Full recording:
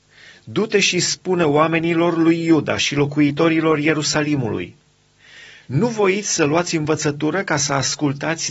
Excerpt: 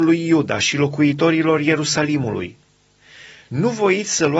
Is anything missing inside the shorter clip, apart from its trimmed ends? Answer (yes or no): no